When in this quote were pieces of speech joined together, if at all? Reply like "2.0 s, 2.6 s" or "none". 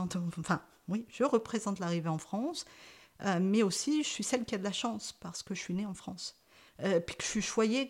none